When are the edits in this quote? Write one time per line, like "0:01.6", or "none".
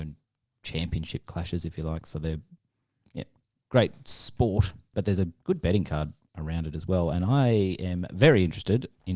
none